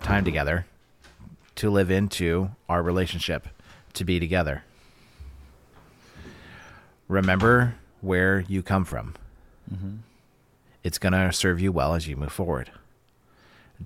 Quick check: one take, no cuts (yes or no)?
yes